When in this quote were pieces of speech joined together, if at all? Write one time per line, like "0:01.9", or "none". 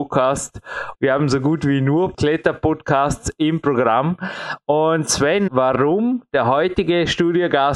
0:00.9
0:05.5